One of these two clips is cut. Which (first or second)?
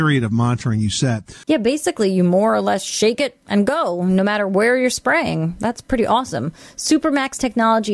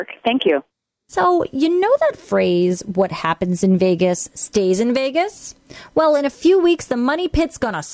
first